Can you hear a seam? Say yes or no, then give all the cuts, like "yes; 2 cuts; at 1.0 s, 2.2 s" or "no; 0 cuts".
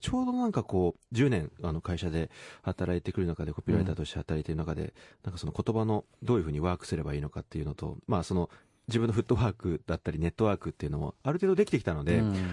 no; 0 cuts